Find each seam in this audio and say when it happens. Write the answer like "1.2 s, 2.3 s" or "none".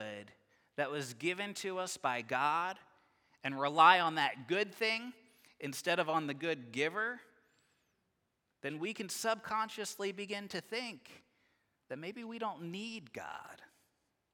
none